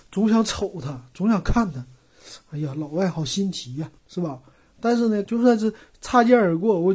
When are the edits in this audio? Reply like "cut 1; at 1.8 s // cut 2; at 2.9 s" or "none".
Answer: cut 1; at 4.0 s // cut 2; at 5.2 s